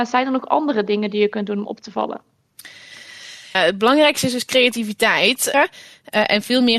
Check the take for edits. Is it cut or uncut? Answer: cut